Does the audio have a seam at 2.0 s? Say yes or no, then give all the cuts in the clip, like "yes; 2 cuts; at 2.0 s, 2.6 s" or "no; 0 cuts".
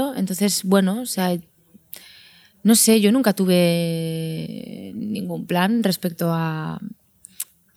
no; 0 cuts